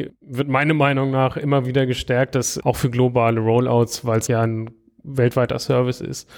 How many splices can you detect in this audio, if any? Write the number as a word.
two